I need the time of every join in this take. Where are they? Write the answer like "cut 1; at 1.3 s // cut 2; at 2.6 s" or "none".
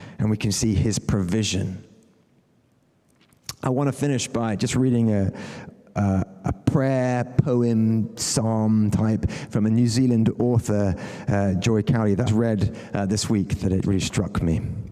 cut 1; at 12.3 s // cut 2; at 13.8 s